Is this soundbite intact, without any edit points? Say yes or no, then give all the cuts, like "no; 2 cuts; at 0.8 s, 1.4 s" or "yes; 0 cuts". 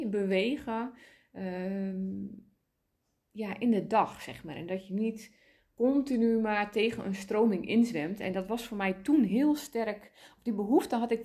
yes; 0 cuts